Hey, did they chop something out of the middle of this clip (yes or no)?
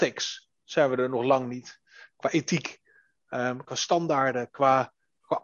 yes